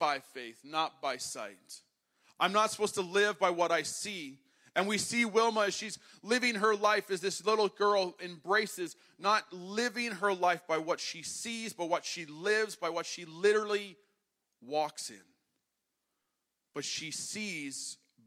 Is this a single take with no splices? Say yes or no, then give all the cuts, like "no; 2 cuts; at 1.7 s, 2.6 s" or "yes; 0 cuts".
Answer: yes; 0 cuts